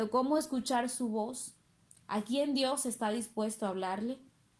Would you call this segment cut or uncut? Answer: uncut